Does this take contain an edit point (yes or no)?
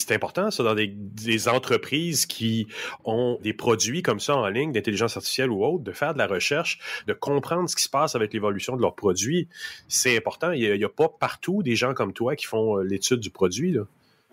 yes